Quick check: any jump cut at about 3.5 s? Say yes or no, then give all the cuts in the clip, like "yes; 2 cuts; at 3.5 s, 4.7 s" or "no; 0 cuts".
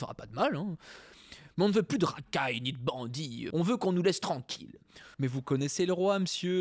yes; 2 cuts; at 3.5 s, 5.1 s